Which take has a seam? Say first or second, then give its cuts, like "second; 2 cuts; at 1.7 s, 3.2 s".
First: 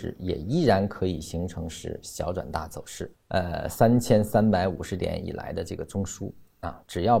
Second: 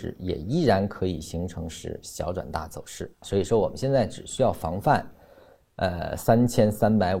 first; 1 cut; at 3.1 s